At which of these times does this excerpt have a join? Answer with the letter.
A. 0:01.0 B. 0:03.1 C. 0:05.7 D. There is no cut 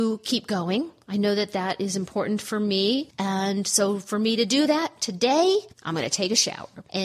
C